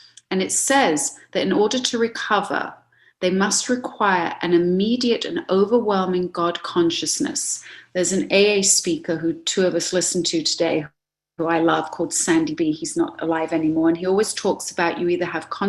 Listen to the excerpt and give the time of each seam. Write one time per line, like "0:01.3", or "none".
none

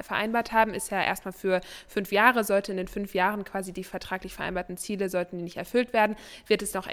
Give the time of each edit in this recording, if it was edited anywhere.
none

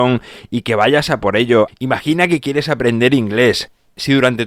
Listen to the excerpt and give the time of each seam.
0:01.7

